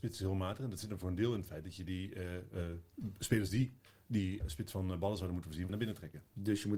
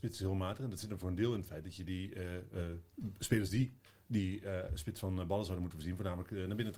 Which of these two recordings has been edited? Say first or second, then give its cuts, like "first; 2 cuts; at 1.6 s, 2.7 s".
first; 2 cuts; at 4.4 s, 5.7 s